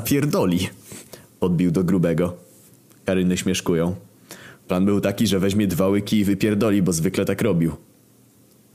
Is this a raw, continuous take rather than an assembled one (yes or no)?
no